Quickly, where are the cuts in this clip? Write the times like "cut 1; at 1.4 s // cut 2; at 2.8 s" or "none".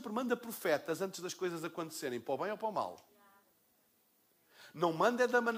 none

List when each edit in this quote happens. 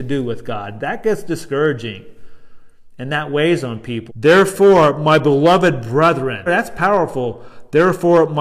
cut 1; at 4.1 s // cut 2; at 6.5 s

